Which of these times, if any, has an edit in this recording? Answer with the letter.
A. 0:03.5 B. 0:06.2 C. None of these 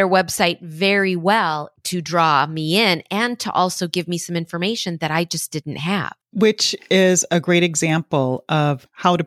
B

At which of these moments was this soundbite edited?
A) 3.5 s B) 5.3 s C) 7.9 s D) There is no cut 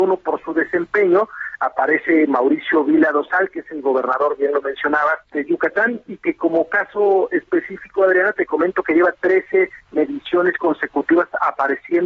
B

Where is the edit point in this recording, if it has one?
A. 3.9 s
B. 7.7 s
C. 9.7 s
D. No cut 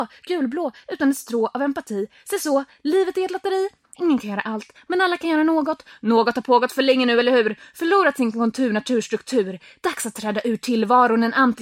A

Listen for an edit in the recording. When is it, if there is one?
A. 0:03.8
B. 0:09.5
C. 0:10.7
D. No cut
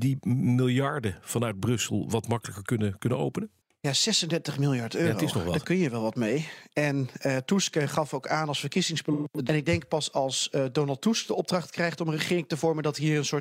B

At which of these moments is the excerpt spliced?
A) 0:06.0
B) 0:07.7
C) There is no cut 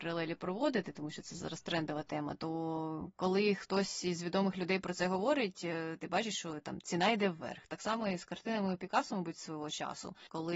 C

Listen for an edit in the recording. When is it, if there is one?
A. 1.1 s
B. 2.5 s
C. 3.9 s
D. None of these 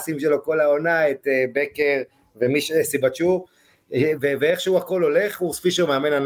D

